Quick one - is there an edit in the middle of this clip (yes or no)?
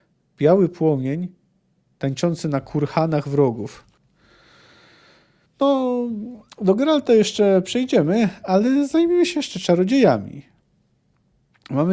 no